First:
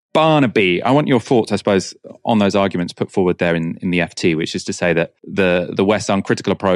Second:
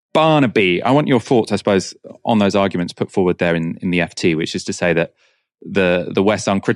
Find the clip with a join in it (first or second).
first